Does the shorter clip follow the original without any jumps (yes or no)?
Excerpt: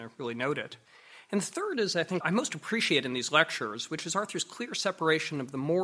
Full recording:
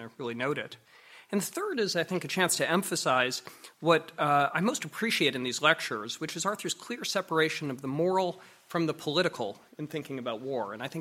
no